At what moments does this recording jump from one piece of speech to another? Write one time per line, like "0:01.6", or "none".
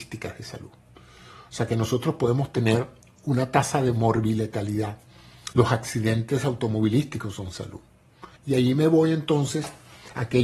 0:05.5
0:08.4